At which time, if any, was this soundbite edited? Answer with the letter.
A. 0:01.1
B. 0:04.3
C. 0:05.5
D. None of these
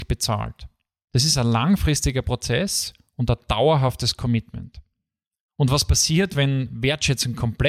A